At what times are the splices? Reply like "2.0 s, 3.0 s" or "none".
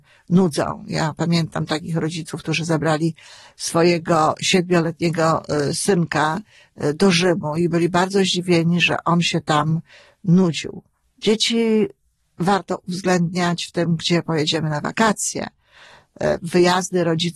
11.0 s